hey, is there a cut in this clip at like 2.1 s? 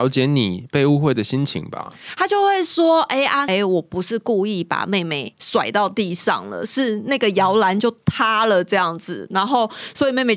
no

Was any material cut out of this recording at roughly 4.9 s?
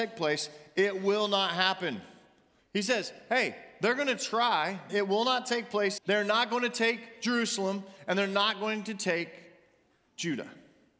yes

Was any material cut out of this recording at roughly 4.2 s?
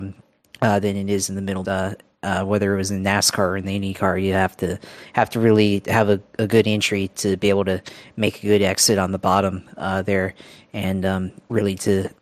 no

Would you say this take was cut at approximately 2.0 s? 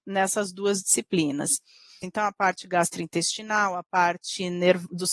yes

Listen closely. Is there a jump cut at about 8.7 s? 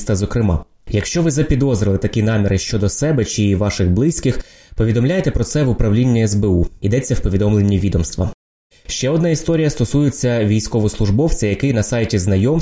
yes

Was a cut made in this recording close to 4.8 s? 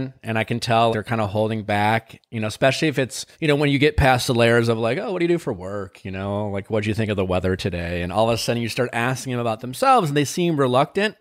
no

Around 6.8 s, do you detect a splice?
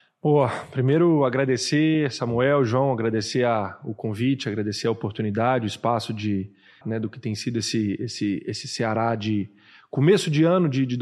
yes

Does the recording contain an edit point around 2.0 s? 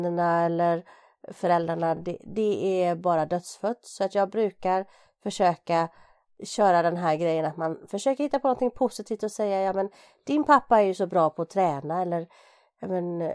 no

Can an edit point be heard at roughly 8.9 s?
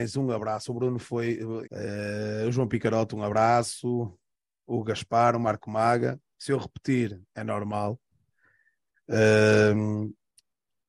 yes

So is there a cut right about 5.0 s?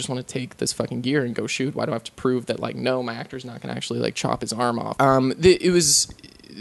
yes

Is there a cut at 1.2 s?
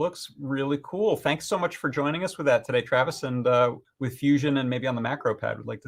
no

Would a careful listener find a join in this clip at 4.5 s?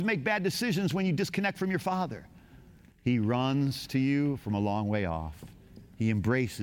no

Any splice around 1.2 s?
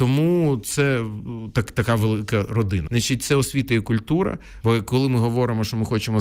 no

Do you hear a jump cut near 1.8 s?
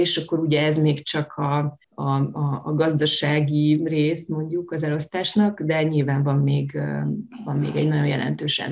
yes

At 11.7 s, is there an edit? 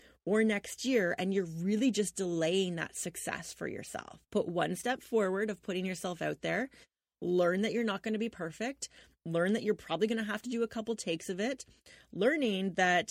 no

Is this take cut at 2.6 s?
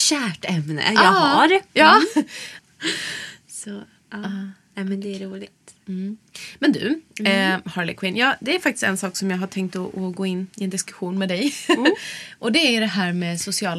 yes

